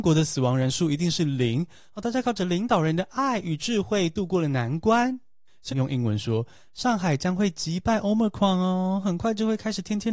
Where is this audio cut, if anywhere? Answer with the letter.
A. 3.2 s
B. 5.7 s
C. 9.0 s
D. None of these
B